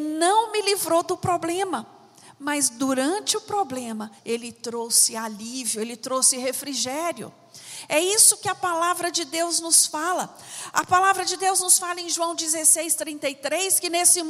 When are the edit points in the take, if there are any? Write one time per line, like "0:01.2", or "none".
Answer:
0:04.2